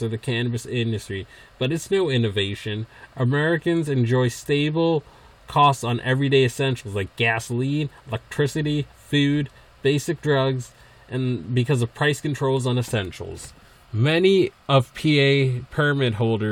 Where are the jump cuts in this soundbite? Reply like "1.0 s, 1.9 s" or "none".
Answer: 8.9 s, 14.6 s